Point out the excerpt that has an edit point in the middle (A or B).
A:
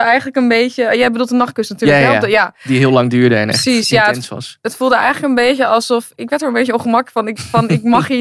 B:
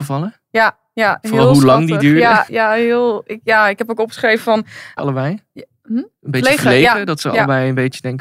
B